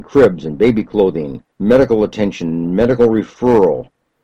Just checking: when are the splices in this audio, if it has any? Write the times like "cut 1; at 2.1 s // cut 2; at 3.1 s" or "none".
cut 1; at 1.5 s